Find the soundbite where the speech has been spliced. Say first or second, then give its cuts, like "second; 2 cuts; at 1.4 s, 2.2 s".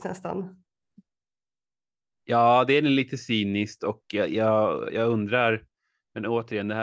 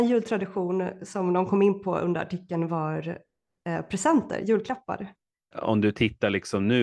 second; 1 cut; at 5.5 s